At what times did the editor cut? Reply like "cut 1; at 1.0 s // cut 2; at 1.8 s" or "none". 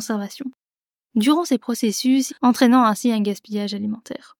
cut 1; at 2.3 s